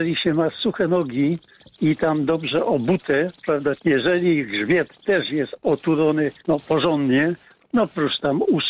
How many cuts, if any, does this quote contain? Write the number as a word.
two